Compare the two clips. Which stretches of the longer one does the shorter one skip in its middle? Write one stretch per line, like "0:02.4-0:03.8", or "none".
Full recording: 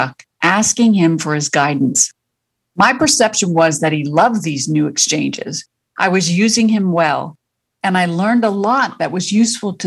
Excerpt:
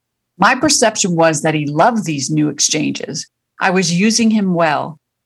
none